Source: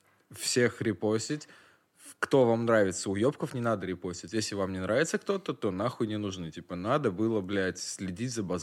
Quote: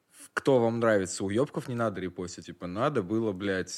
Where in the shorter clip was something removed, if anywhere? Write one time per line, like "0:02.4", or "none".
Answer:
0:02.4